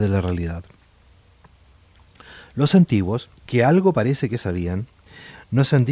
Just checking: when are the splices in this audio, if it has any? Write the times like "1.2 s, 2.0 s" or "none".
3.4 s